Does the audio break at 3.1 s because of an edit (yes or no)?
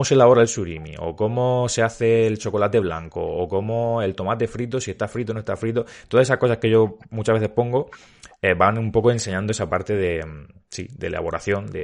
no